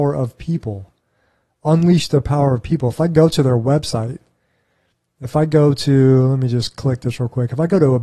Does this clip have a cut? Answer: no; 0 cuts

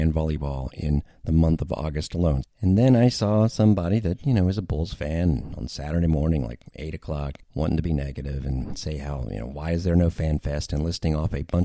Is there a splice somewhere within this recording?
yes; 2 cuts; at 2.4 s, 7.4 s

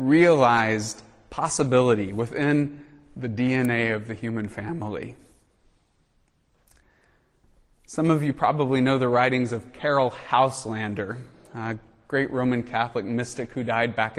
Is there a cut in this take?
no; 0 cuts

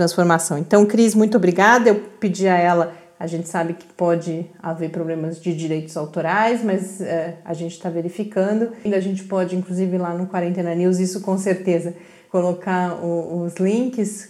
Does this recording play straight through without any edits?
no; 1 cut; at 8.9 s

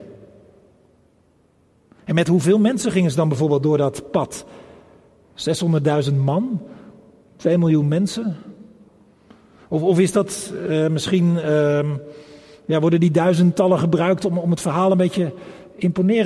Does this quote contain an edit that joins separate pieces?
no; 0 cuts

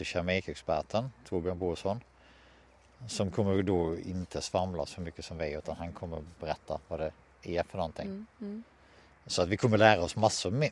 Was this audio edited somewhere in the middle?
no; 0 cuts

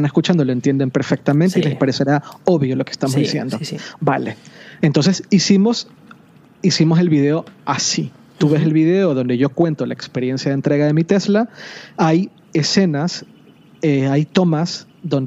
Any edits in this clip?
no; 0 cuts

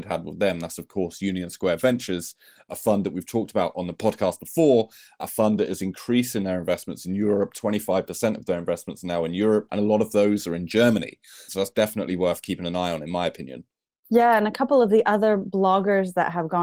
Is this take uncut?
no; 1 cut; at 11.5 s

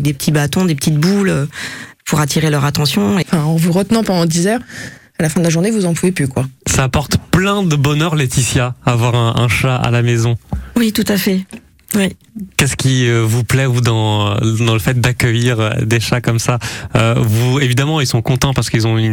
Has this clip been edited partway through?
yes; 1 cut; at 3.2 s

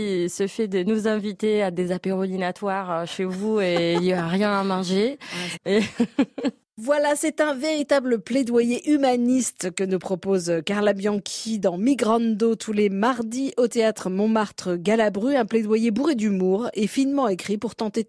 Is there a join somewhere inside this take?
yes; 1 cut; at 5.6 s

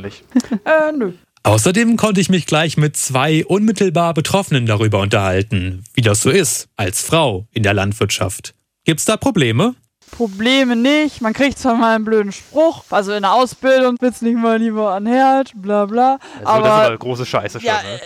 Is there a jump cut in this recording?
no; 0 cuts

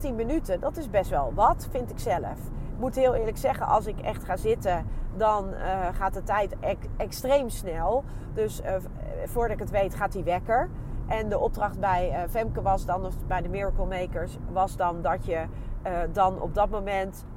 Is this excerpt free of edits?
yes; 0 cuts

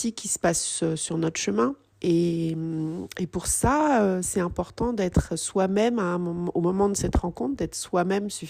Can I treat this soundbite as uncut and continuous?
no; 1 cut; at 1.9 s

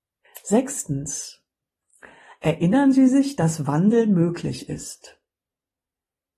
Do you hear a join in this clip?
no; 0 cuts

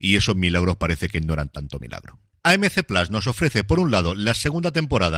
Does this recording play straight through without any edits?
no; 1 cut; at 2.4 s

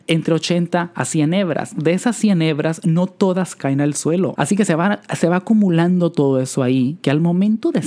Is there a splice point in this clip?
yes; 1 cut; at 4.3 s

